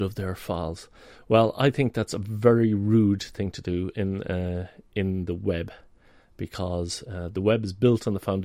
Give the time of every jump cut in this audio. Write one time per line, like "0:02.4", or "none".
none